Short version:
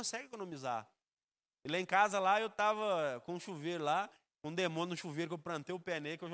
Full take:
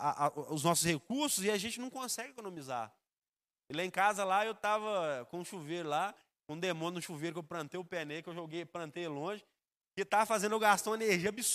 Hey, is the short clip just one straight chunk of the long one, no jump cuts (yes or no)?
yes